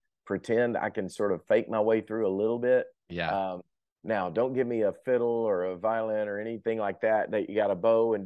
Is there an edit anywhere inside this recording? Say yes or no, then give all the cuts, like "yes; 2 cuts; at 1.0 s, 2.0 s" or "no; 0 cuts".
no; 0 cuts